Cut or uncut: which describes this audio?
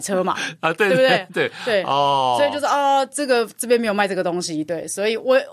uncut